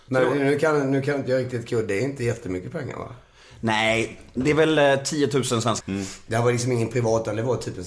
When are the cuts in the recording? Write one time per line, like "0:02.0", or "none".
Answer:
0:05.8